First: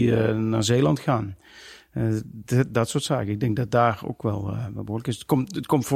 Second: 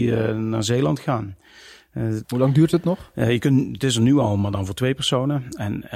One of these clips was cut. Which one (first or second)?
second